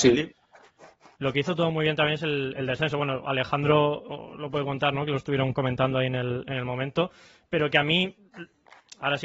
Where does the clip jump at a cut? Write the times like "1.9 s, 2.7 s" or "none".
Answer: none